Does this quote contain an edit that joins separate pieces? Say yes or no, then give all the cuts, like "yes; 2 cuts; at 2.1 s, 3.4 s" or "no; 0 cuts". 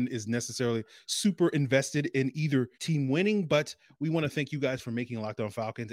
yes; 1 cut; at 2.7 s